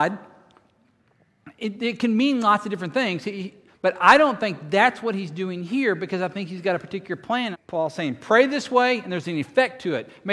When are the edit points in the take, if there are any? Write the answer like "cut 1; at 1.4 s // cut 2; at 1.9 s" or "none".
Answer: cut 1; at 3.7 s // cut 2; at 7.5 s